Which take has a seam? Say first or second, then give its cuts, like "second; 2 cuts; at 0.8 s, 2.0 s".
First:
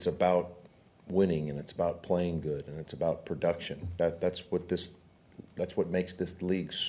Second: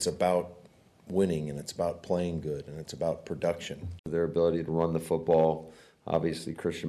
second; 1 cut; at 4.0 s